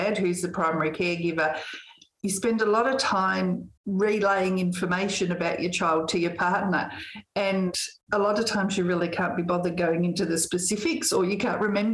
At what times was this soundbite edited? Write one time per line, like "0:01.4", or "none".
0:03.8